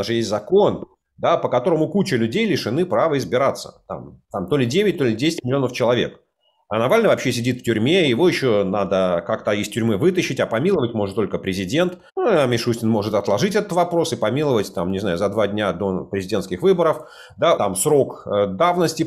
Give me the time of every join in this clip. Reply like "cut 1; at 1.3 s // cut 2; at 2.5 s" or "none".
cut 1; at 12.1 s // cut 2; at 17.6 s